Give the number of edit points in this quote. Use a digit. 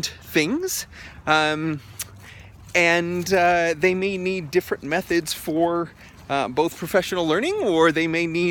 0